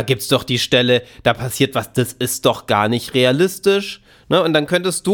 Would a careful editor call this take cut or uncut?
uncut